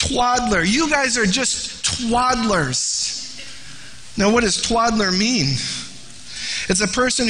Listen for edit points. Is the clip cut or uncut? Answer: uncut